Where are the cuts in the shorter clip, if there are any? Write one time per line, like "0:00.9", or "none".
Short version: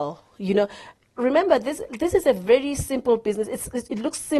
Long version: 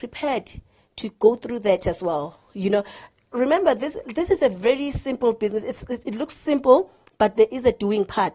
none